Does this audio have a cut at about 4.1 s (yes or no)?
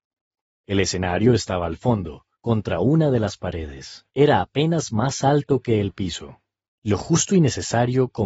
yes